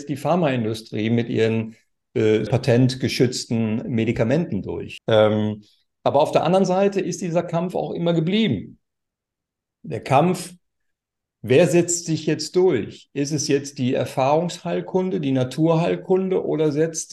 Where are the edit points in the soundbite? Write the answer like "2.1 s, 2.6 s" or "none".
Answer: 2.5 s, 5.0 s